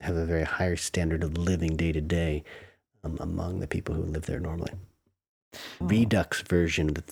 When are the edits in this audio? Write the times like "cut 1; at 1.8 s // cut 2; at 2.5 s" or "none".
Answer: cut 1; at 5.8 s